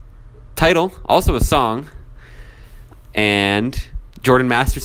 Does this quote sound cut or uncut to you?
uncut